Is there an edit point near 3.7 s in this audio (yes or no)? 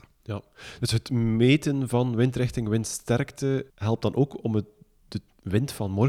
yes